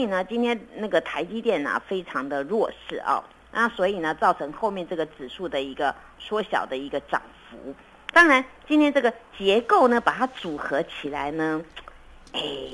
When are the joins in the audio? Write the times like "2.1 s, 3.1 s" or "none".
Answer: none

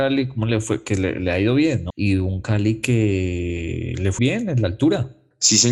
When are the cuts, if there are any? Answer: 1.9 s, 4.2 s

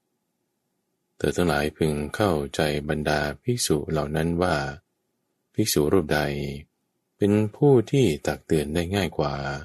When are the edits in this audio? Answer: none

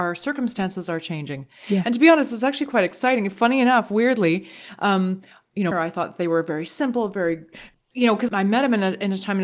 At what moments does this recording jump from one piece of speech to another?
5.7 s, 8.3 s

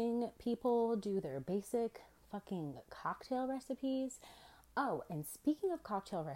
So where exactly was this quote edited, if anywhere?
none

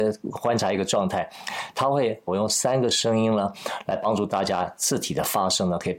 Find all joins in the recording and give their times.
2.3 s

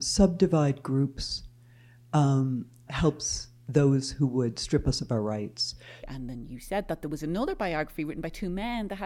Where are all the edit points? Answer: 2.9 s, 6.0 s

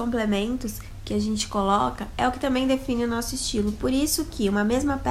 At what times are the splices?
none

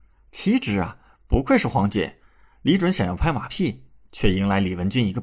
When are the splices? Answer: none

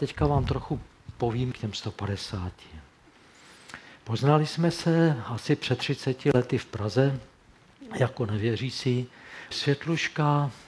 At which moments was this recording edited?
1.5 s, 9.5 s

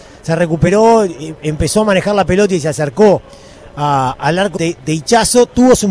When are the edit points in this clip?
4.6 s

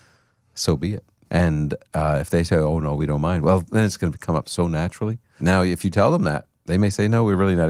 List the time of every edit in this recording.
1.3 s, 5.4 s

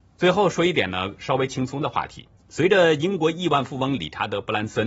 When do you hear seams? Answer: 2.4 s

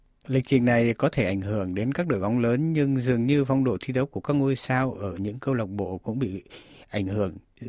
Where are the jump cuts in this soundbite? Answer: none

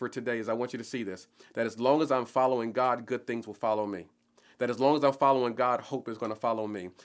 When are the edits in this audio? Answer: none

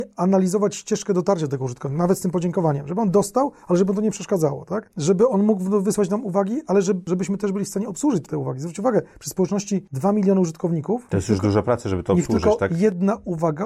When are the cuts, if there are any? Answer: 8.3 s

